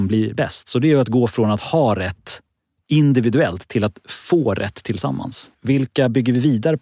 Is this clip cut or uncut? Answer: cut